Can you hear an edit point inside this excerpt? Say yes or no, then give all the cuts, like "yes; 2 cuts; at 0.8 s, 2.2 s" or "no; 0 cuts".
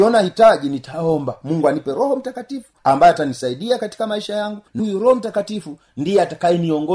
yes; 1 cut; at 4.8 s